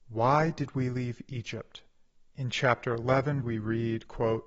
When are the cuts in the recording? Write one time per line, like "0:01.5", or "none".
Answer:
0:02.3
0:03.4